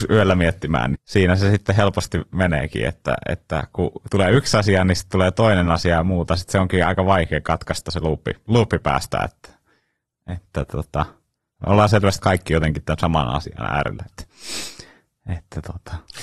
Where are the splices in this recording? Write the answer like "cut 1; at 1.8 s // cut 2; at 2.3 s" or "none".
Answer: cut 1; at 0.9 s // cut 2; at 14.1 s